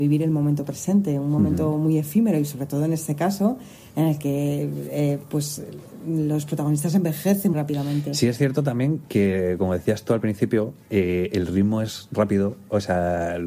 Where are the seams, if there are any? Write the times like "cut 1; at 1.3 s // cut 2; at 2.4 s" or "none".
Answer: cut 1; at 7.5 s